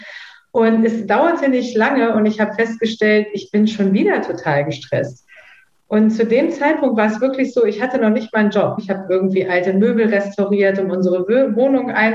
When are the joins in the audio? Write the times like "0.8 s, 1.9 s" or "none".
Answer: 8.8 s